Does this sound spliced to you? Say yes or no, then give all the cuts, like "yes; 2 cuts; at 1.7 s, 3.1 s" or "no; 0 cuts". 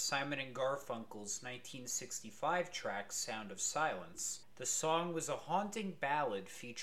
yes; 1 cut; at 4.5 s